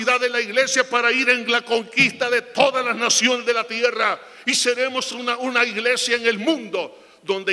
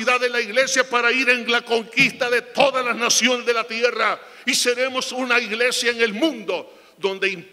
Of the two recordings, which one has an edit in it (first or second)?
second